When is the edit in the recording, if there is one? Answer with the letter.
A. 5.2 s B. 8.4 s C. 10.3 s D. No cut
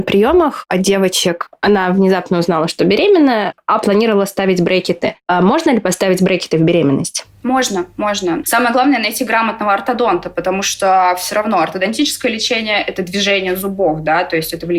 B